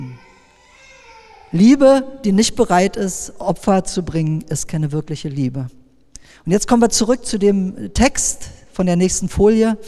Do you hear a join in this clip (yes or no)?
no